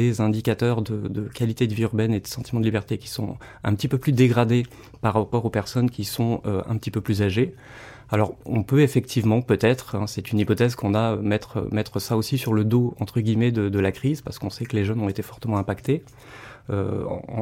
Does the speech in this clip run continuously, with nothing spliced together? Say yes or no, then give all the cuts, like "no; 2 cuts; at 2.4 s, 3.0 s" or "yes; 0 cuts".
yes; 0 cuts